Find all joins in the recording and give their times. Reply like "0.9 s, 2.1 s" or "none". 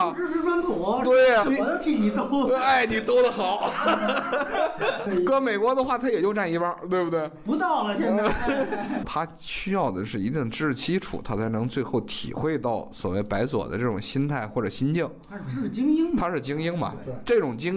1.4 s